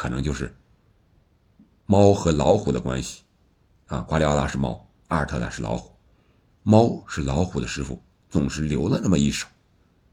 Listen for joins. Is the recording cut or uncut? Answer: uncut